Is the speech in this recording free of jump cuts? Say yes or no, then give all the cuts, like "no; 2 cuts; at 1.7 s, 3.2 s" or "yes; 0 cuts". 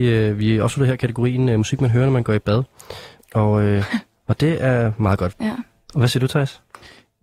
no; 2 cuts; at 3.2 s, 5.3 s